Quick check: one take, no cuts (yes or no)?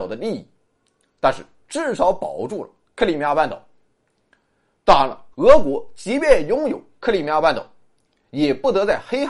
no